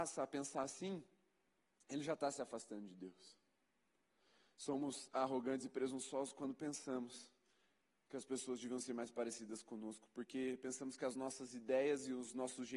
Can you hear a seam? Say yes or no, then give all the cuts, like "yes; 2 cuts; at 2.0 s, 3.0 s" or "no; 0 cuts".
no; 0 cuts